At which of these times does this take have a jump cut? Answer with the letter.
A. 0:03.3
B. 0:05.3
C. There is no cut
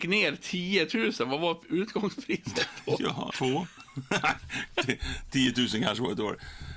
A